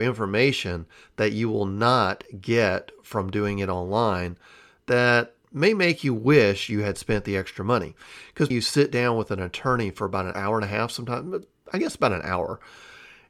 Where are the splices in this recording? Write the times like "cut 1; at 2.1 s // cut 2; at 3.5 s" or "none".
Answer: cut 1; at 8.5 s // cut 2; at 10.3 s